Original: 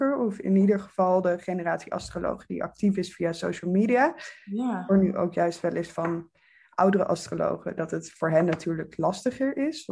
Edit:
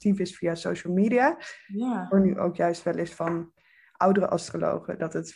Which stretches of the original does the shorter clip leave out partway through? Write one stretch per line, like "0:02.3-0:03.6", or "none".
none